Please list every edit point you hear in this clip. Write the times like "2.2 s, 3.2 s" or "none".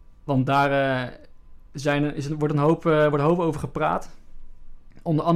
none